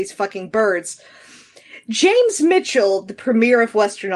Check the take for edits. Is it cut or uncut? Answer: uncut